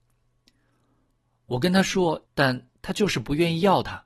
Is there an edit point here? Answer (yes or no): yes